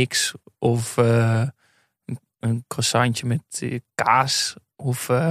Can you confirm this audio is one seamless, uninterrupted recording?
yes; 0 cuts

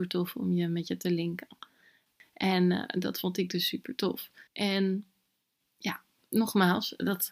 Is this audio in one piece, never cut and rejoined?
no; 2 cuts; at 4.5 s, 6.2 s

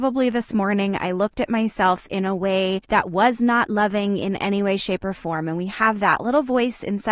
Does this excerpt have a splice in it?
yes; 1 cut; at 2.8 s

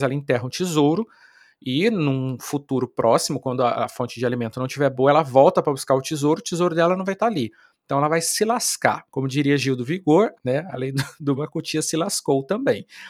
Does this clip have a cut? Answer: yes; 3 cuts; at 9.1 s, 10.3 s, 11.4 s

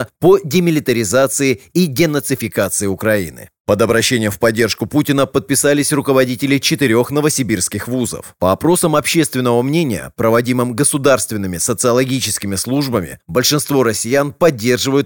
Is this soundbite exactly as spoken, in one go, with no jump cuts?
yes; 0 cuts

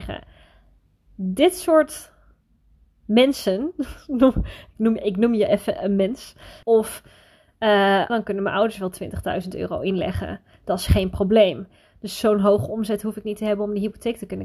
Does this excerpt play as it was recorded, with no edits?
no; 2 cuts; at 6.6 s, 8.1 s

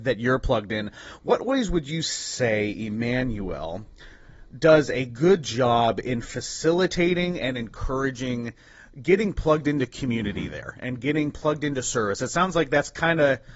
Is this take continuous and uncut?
yes; 0 cuts

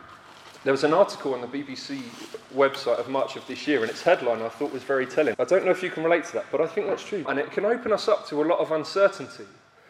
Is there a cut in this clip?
yes; 2 cuts; at 5.3 s, 7.2 s

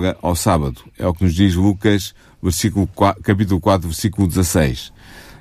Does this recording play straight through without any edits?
yes; 0 cuts

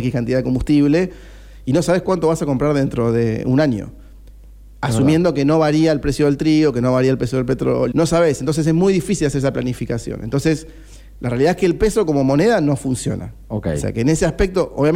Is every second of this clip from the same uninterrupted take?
no; 1 cut; at 7.9 s

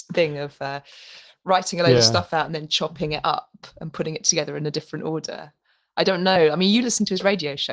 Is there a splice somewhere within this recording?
no; 0 cuts

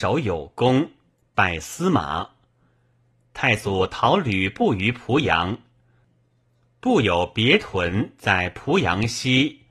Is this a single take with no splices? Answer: yes; 0 cuts

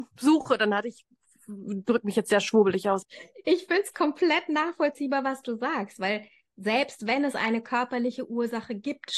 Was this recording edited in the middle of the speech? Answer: yes; 1 cut; at 3.0 s

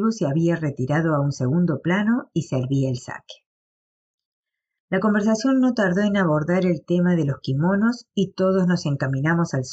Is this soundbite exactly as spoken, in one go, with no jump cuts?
no; 1 cut; at 4.8 s

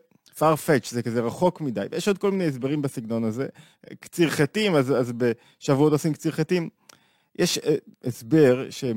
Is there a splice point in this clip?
no; 0 cuts

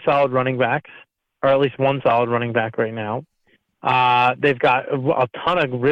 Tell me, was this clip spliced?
no; 0 cuts

